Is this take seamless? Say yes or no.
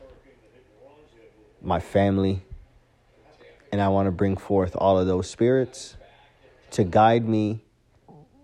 yes